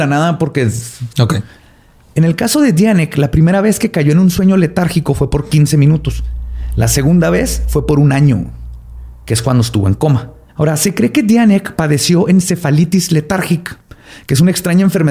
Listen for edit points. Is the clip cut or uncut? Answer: cut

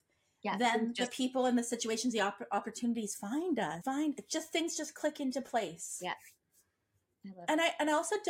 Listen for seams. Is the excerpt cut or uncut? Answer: cut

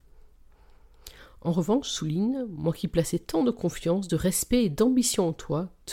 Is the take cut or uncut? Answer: uncut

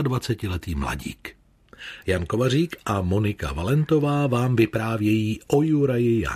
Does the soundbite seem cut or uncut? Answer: cut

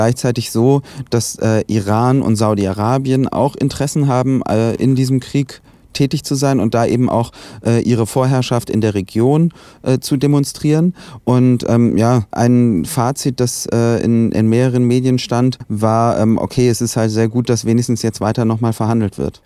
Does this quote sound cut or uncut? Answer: cut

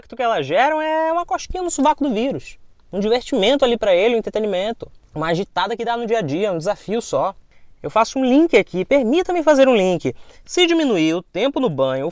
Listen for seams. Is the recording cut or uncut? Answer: uncut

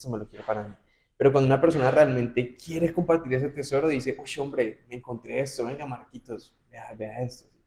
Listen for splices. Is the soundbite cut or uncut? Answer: uncut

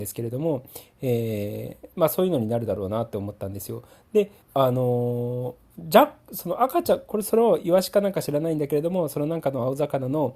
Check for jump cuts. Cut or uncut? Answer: cut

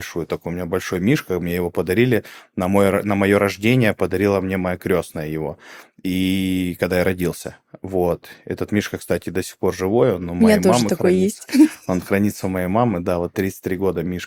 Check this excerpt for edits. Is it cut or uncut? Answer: uncut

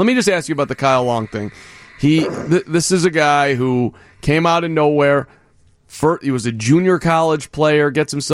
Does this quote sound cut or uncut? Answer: uncut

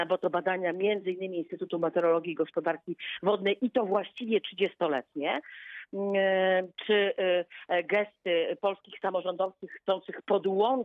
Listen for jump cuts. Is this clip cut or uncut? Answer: uncut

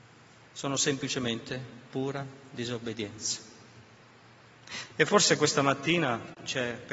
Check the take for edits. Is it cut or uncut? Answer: uncut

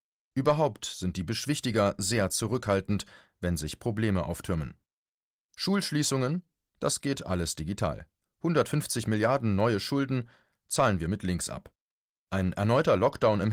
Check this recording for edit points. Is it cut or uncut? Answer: cut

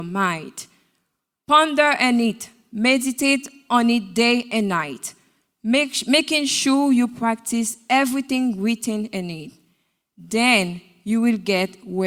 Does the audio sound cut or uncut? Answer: uncut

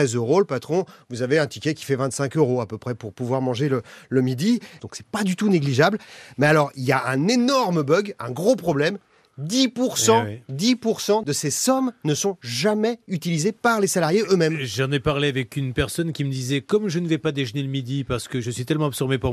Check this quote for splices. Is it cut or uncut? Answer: cut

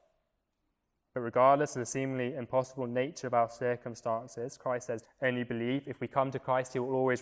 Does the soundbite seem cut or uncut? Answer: cut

